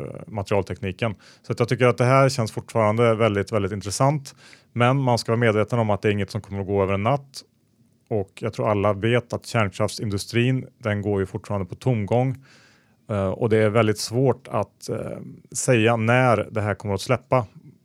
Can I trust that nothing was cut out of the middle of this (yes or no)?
yes